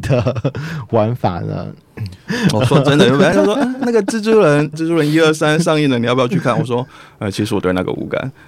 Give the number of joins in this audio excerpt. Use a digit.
2